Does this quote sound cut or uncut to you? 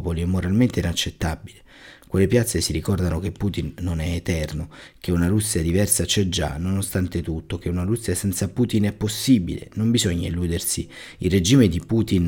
uncut